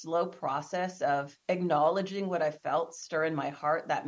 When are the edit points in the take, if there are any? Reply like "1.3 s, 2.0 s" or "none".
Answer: 1.4 s